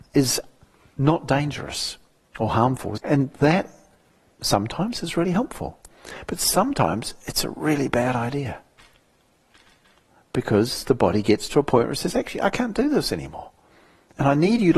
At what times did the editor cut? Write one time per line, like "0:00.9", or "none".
0:03.0